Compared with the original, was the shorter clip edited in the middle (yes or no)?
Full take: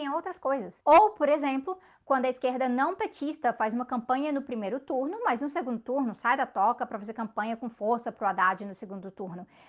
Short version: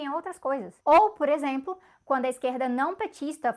no